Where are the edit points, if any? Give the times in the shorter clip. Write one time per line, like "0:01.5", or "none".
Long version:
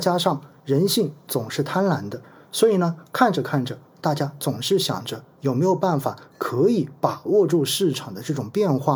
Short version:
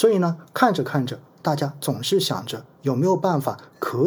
none